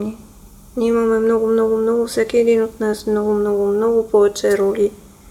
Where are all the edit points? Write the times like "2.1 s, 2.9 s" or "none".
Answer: none